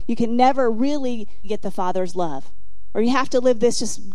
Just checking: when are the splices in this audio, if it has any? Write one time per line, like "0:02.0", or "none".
0:01.4